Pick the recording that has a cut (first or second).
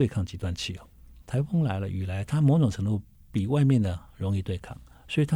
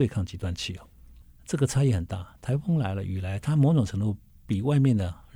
first